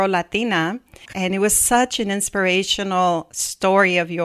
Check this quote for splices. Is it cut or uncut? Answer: cut